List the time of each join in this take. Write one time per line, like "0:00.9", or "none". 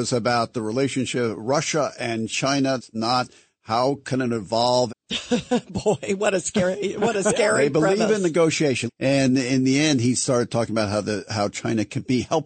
0:02.8
0:04.9
0:08.9